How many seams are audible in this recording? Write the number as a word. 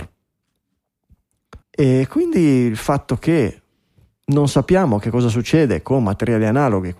one